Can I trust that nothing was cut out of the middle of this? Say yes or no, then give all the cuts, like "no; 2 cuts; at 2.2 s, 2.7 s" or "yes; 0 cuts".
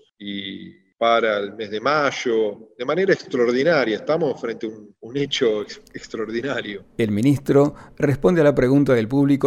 no; 1 cut; at 6.8 s